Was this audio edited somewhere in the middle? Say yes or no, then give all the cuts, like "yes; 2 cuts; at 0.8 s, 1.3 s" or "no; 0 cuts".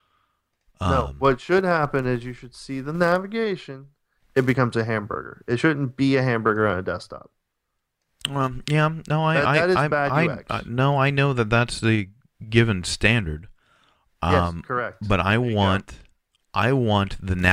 yes; 1 cut; at 4.2 s